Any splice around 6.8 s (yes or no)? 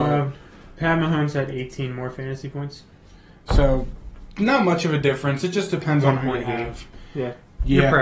no